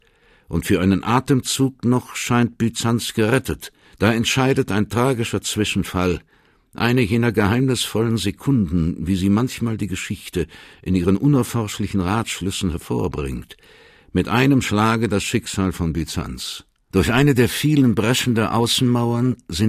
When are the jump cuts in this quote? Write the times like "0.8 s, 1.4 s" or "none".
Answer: 3.9 s, 16.9 s